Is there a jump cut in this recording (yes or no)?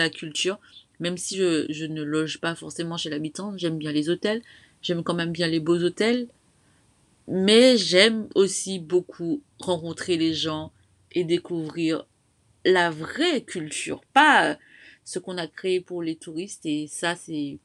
no